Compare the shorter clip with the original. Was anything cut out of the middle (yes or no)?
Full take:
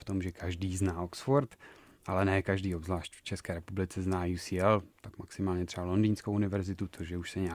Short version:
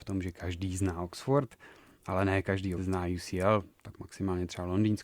yes